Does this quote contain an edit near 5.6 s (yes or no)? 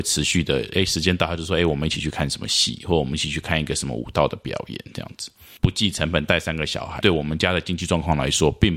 yes